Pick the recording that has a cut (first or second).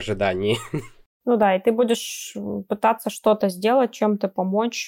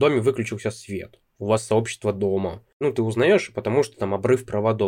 second